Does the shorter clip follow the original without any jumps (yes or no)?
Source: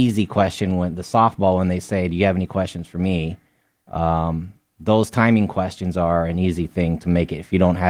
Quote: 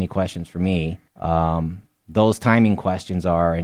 no